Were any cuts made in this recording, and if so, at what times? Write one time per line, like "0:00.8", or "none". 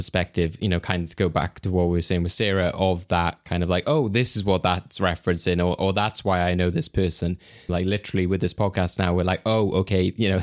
0:07.7